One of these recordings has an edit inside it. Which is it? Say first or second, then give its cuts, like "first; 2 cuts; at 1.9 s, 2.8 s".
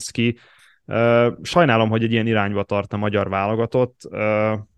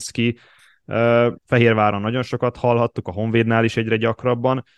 second; 1 cut; at 1.4 s